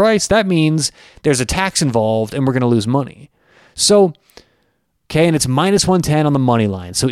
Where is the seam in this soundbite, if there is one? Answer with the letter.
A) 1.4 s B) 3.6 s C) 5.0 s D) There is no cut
C